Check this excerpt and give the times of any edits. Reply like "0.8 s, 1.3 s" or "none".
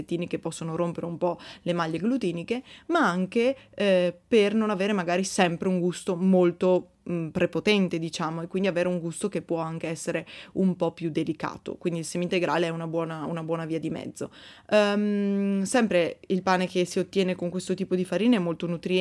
none